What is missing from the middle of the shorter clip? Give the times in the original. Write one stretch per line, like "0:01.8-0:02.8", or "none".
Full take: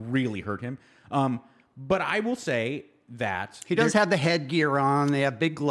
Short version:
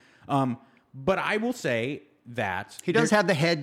none

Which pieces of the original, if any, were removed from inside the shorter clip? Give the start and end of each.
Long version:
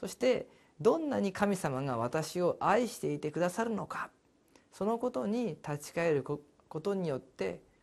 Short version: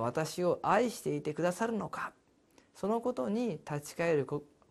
none

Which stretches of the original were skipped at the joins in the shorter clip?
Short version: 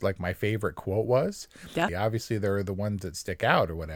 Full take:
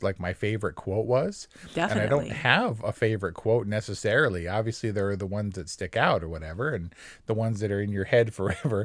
0:01.9-0:04.4

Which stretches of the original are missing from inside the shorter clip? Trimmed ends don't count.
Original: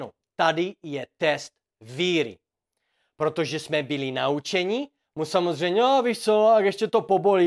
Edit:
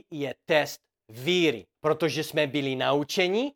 0:02.5-0:03.1

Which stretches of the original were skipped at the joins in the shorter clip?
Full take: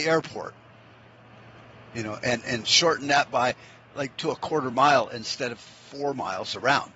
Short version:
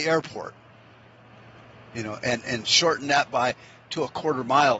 0:03.9-0:04.2

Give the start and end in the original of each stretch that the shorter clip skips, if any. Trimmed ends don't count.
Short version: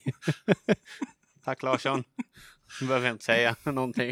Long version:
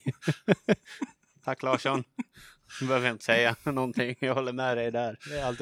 none

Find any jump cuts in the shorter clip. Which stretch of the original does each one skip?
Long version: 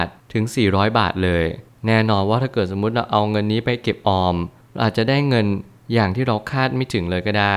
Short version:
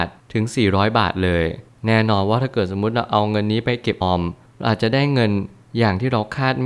0:04.0-0:04.2

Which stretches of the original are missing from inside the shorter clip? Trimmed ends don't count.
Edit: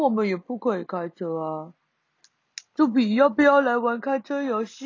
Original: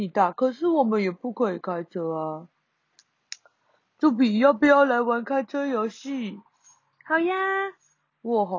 0:03.4-0:03.9

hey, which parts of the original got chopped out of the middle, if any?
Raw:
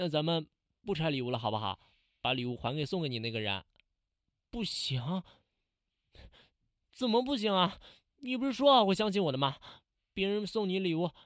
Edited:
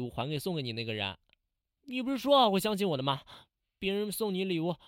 0:04.2-0:08.1

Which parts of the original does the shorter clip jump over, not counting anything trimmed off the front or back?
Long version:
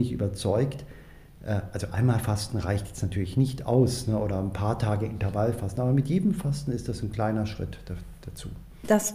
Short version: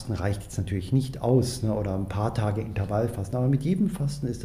none

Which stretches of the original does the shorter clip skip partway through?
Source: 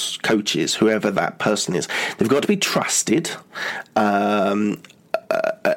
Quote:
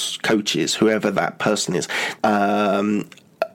0:02.2-0:03.9

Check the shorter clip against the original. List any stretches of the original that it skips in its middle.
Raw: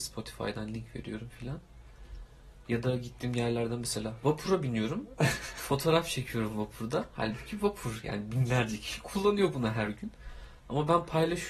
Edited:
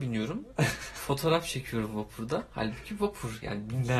none

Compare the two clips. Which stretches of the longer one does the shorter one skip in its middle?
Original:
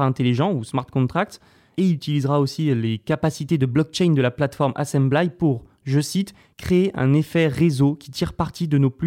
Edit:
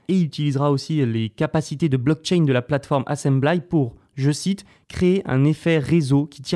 none

